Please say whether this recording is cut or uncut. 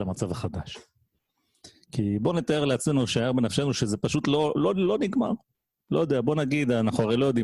uncut